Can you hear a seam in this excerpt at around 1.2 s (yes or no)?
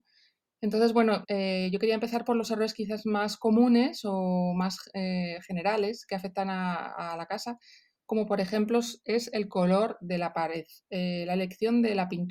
yes